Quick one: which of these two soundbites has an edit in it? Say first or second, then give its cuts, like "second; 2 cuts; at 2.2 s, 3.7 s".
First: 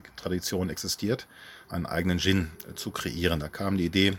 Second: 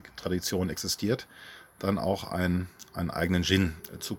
first; 1 cut; at 1.6 s